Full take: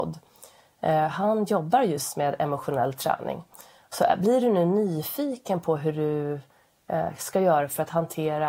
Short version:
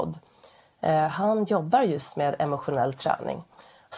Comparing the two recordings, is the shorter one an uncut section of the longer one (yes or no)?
yes